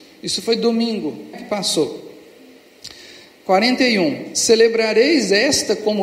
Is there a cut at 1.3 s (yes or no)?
yes